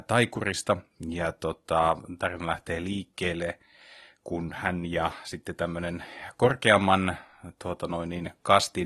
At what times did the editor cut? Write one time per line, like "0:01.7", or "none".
none